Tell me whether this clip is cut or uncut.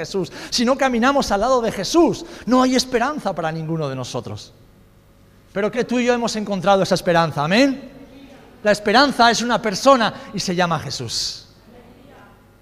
cut